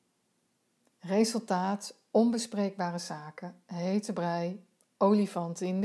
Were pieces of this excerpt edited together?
no; 0 cuts

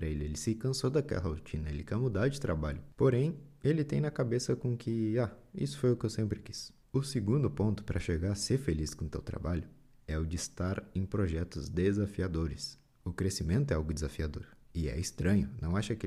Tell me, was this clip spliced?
no; 0 cuts

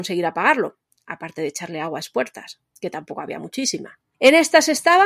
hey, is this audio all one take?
yes; 0 cuts

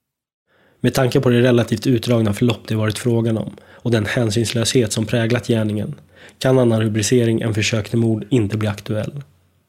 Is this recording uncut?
yes; 0 cuts

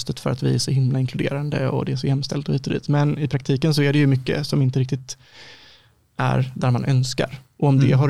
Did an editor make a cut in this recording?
no; 0 cuts

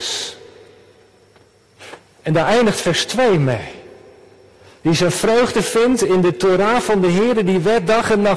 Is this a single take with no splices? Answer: yes; 0 cuts

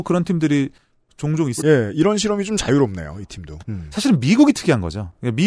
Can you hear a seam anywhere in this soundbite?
yes; 2 cuts; at 1.6 s, 3.6 s

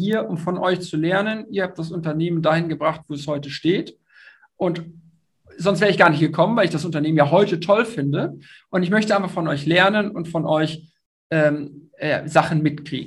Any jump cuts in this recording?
no; 0 cuts

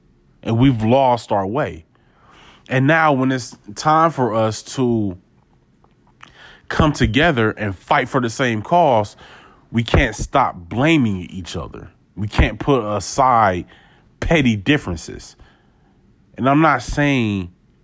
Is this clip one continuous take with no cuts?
yes; 0 cuts

